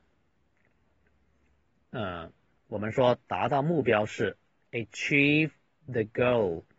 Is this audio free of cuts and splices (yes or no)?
no